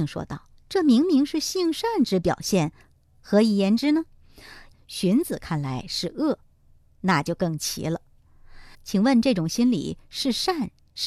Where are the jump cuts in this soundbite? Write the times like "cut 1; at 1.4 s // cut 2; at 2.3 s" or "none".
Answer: cut 1; at 4.7 s // cut 2; at 8.7 s